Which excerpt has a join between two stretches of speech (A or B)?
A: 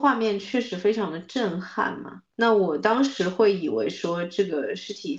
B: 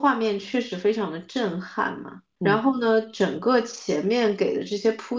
A